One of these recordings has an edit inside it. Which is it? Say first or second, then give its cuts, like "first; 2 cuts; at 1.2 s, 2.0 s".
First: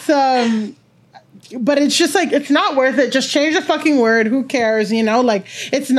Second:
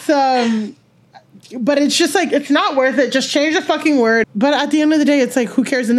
second; 1 cut; at 4.2 s